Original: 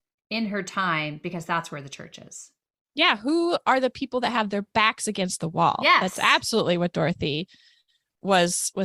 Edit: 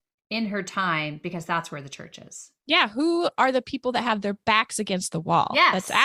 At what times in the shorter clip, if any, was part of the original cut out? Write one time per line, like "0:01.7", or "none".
0:02.6